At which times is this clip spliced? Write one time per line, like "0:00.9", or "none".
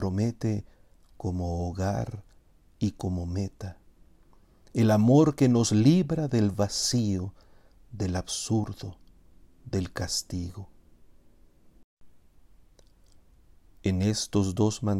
none